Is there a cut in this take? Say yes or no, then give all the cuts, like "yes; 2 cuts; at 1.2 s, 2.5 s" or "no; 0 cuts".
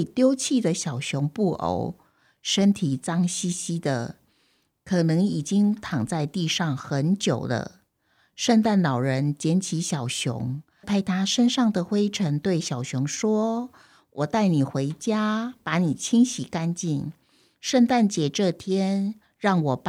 yes; 1 cut; at 10.8 s